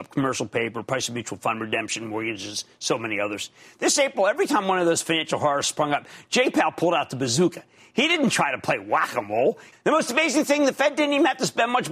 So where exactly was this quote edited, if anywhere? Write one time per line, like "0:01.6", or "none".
0:09.7